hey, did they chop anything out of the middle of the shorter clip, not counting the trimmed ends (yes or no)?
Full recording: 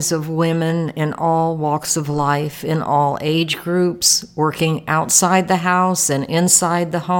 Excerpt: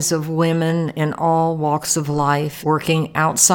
yes